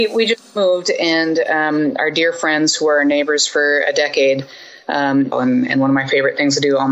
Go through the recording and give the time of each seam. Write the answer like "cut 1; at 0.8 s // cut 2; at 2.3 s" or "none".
cut 1; at 5.3 s